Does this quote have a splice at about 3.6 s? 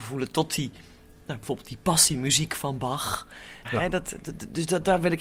yes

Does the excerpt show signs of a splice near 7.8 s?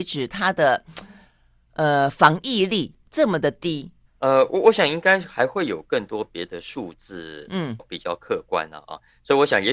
yes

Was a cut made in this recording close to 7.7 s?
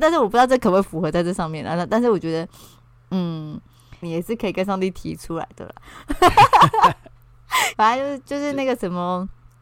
yes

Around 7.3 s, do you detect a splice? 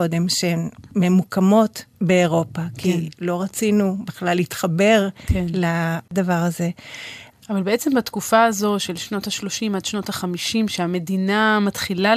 yes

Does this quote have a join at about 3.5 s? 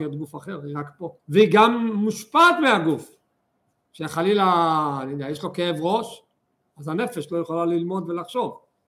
no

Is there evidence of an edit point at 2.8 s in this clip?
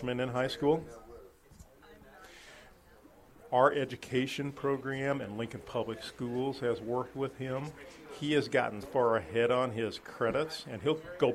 no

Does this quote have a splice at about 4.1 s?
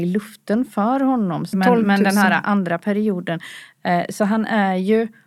no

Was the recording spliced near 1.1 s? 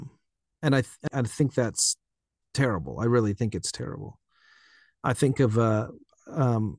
yes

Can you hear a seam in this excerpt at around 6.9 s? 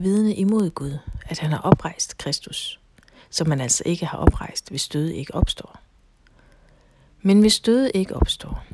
no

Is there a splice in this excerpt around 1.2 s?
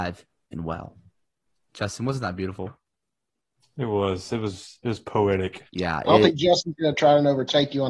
no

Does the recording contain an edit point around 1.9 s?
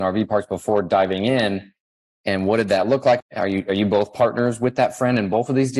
no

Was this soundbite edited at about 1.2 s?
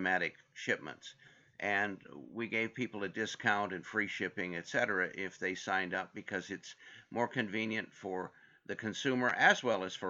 no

